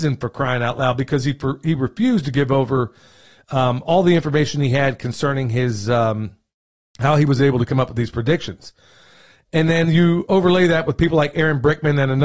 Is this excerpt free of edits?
yes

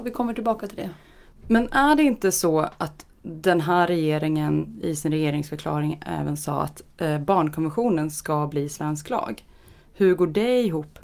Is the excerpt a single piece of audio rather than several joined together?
yes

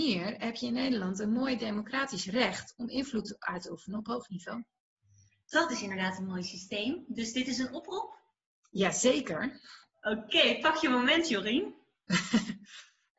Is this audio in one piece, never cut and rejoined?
yes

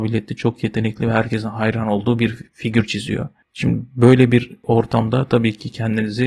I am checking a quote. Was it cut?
no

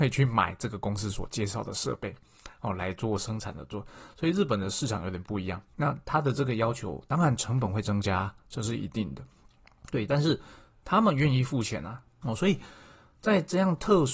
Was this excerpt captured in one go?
no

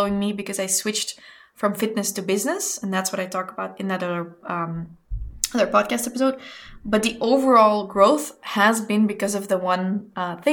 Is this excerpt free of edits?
yes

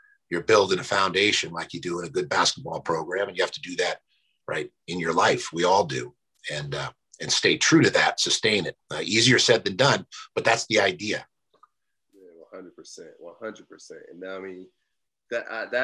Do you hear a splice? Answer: no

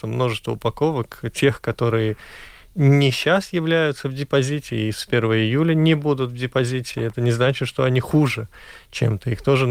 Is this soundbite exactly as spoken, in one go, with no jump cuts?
yes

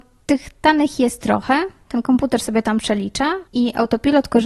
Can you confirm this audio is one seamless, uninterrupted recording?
no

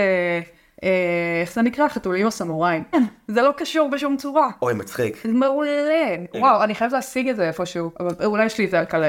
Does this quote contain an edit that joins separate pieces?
yes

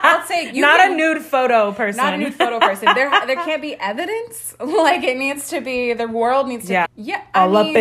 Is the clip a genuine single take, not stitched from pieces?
no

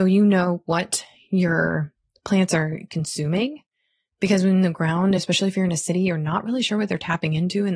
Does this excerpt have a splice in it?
no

